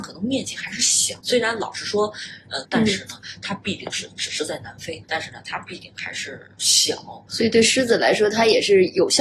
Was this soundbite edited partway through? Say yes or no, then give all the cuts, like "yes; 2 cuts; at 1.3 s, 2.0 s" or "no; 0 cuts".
yes; 3 cuts; at 1.2 s, 2.6 s, 5.0 s